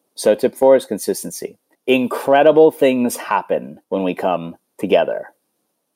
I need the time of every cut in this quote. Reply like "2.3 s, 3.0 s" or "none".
1.7 s, 3.8 s